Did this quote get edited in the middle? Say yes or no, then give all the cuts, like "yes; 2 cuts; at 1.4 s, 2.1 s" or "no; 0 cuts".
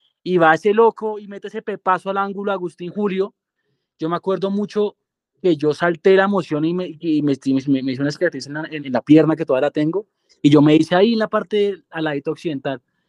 yes; 2 cuts; at 8.8 s, 10.3 s